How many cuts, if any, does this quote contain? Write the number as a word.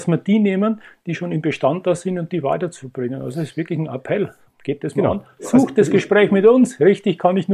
zero